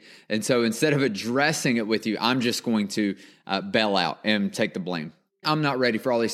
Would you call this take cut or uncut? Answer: cut